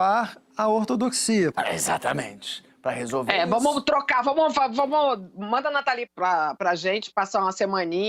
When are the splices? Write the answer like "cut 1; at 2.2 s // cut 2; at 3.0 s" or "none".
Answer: cut 1; at 1.5 s // cut 2; at 6.1 s